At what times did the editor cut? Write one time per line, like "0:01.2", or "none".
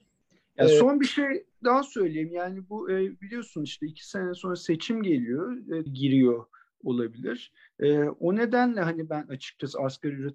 0:05.9